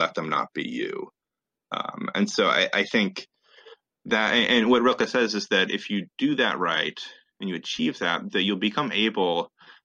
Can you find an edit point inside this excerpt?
no; 0 cuts

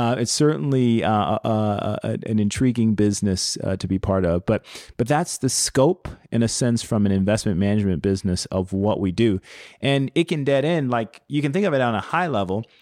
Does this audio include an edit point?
no; 0 cuts

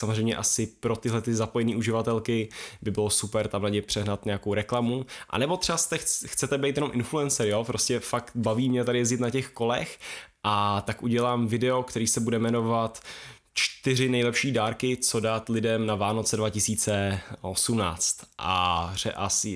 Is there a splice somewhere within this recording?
no; 0 cuts

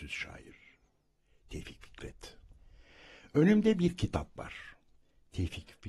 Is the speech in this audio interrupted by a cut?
no; 0 cuts

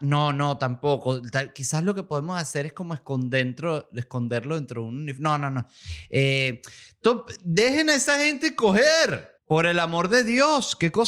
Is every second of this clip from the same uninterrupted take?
no; 1 cut; at 9.4 s

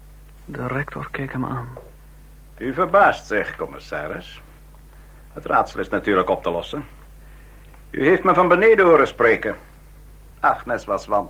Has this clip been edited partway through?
yes; 1 cut; at 10.3 s

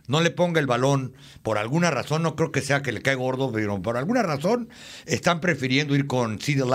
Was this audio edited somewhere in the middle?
no; 0 cuts

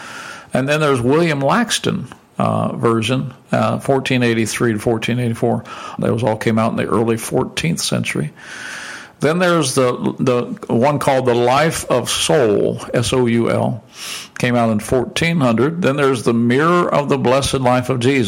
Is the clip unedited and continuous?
no; 1 cut; at 6.0 s

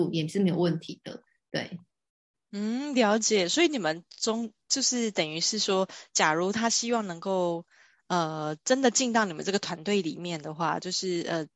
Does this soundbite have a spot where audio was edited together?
no; 0 cuts

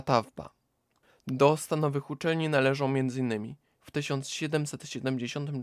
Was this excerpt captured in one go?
no; 2 cuts; at 1.1 s, 3.8 s

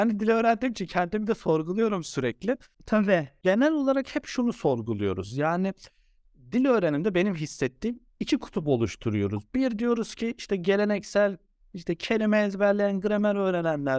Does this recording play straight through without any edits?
yes; 0 cuts

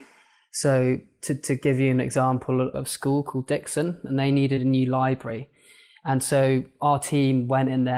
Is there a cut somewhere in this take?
yes; 1 cut; at 2.7 s

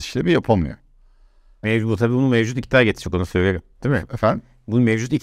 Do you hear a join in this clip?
yes; 1 cut; at 1.6 s

